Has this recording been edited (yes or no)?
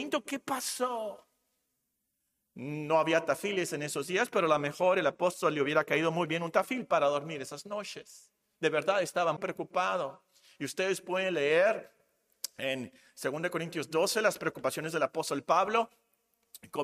yes